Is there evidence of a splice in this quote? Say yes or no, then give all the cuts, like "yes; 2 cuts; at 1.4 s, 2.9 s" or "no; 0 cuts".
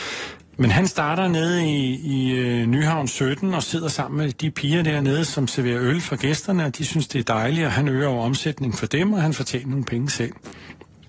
no; 0 cuts